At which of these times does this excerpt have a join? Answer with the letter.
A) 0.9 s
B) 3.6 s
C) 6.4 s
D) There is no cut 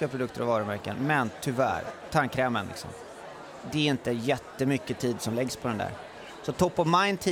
D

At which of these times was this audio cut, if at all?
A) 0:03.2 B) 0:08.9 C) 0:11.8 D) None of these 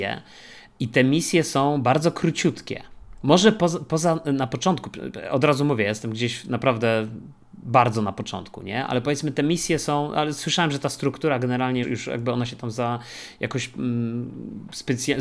C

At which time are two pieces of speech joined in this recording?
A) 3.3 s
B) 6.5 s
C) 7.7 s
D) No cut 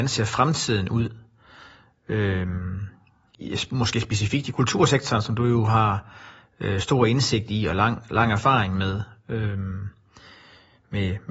A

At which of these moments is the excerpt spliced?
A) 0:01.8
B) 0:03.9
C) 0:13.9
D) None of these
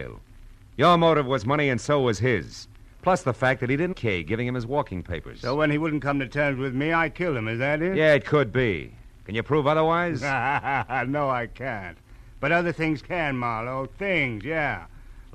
B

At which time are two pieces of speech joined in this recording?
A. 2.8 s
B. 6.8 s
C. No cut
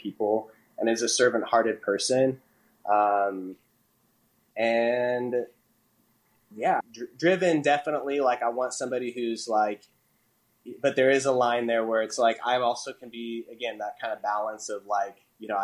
B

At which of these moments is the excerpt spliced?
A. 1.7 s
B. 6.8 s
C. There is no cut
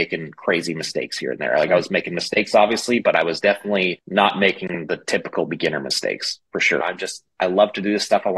B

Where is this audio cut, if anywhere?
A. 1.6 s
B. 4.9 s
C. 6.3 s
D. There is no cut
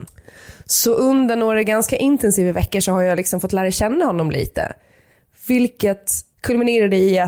C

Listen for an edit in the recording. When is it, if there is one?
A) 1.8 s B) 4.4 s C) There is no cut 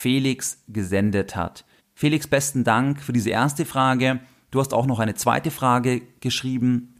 A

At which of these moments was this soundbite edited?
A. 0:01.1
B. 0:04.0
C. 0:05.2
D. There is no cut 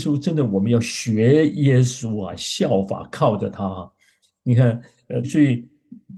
C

